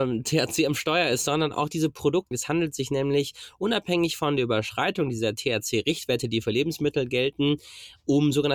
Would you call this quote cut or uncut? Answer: cut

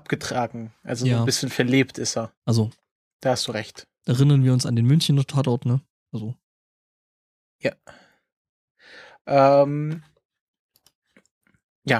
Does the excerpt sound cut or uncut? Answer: cut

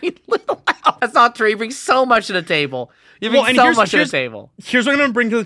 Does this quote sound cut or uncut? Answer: cut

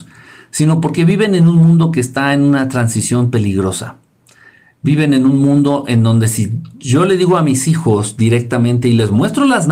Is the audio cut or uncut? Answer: uncut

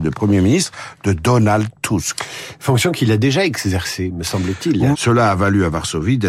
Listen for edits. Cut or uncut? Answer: cut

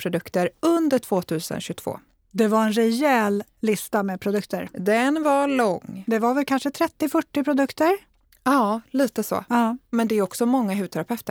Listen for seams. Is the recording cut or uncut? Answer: uncut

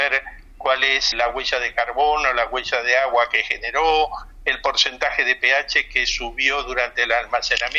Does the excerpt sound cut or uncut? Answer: cut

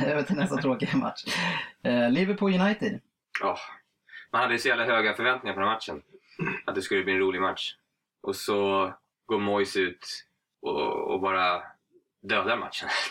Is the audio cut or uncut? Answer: uncut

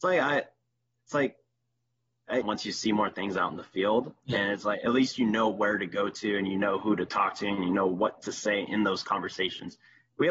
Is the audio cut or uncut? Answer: cut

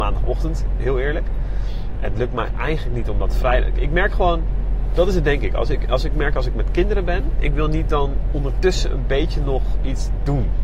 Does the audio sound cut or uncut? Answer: uncut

